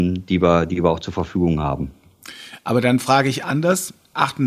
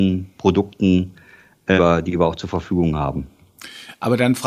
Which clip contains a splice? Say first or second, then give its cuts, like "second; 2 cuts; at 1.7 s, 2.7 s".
second; 1 cut; at 1.8 s